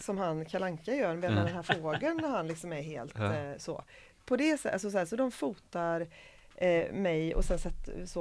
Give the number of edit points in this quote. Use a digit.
0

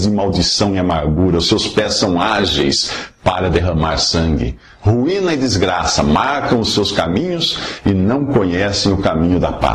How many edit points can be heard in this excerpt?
0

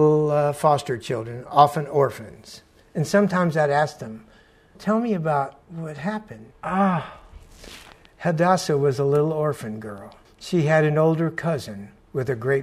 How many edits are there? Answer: 3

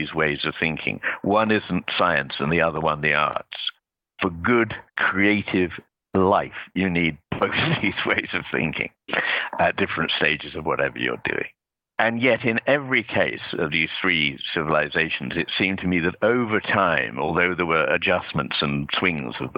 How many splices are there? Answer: 0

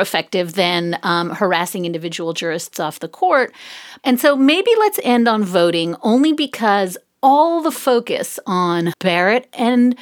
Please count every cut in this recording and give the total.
2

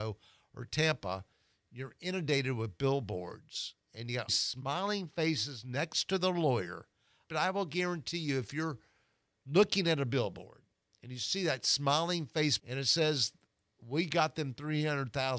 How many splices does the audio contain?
3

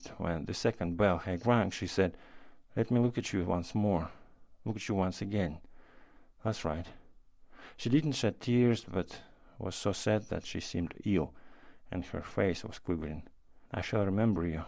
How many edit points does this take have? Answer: 1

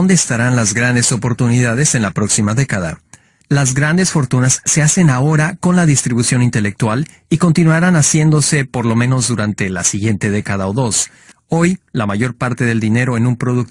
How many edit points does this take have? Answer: 2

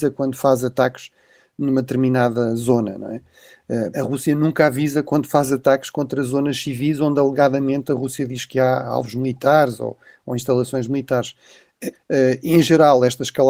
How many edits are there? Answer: 2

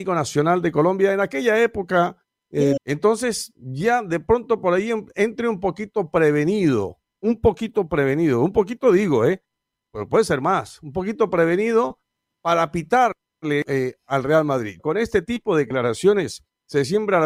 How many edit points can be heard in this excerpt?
2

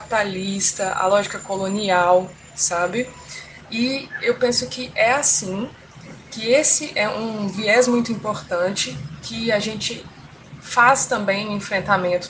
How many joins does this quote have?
1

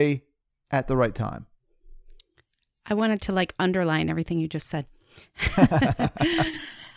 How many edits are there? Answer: 0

